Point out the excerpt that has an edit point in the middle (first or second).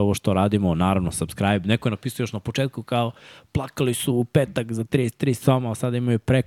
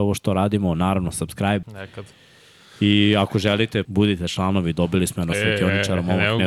second